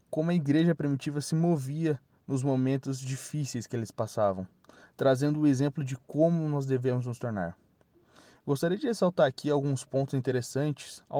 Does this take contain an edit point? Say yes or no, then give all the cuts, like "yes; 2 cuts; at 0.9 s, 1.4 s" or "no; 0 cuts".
no; 0 cuts